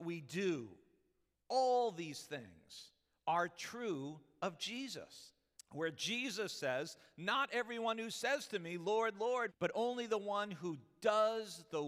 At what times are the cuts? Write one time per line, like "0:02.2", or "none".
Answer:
0:01.3
0:05.5
0:09.5